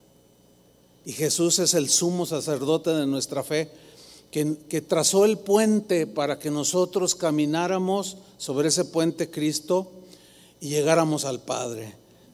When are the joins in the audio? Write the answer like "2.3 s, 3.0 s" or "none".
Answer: none